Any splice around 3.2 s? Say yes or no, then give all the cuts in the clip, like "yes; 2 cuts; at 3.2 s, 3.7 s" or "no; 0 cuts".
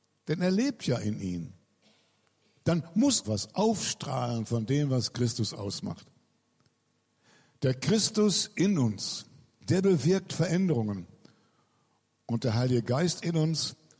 yes; 1 cut; at 3.2 s